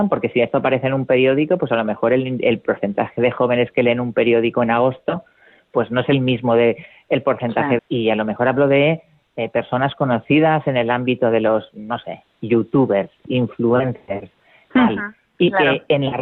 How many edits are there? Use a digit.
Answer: 2